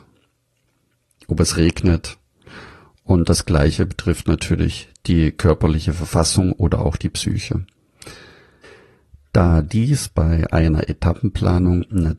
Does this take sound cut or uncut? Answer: uncut